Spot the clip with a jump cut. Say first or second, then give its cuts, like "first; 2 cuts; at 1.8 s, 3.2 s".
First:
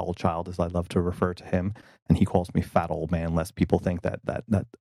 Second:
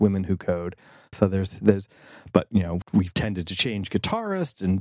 second; 2 cuts; at 1.1 s, 2.8 s